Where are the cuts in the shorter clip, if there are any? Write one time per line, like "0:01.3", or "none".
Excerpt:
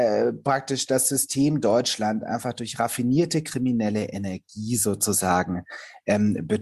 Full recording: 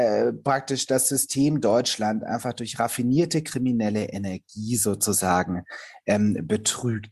none